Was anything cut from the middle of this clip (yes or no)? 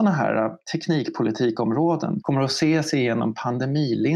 yes